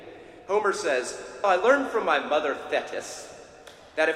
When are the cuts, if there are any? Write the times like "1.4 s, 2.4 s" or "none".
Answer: 1.4 s